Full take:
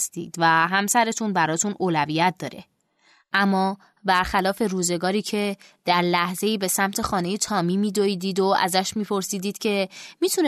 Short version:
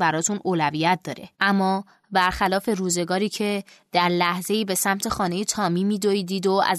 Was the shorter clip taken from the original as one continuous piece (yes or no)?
no